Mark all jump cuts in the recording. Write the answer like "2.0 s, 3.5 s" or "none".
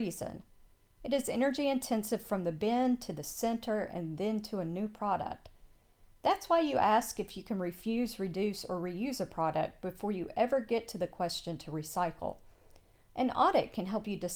none